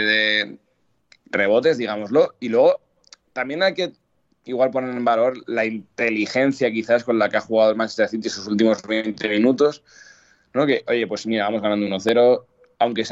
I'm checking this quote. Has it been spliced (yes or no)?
no